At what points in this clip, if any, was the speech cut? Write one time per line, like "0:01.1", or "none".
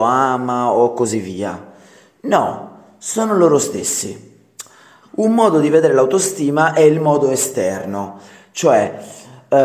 0:05.1

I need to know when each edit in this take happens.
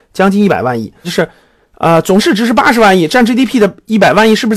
0:01.0

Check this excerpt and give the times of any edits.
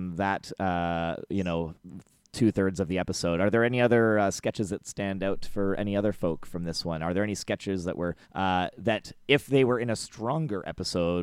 0:08.2

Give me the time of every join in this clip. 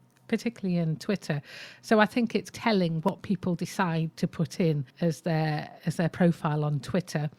0:02.5
0:04.9

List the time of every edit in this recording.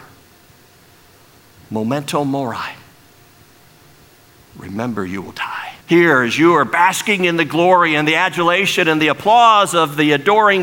0:04.5
0:05.8

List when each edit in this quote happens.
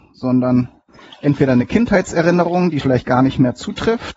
0:02.8

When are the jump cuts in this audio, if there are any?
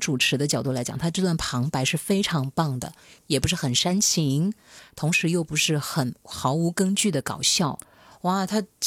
0:03.2

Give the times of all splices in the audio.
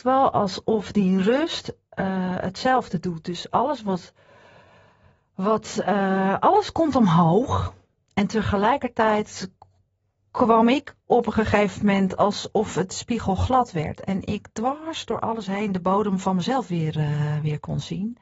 none

